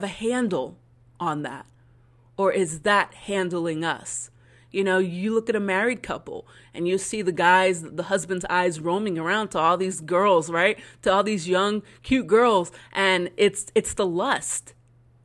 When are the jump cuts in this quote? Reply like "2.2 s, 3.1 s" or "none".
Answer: none